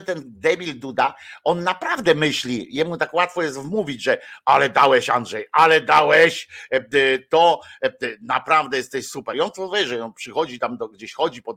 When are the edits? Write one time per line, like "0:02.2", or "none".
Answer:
none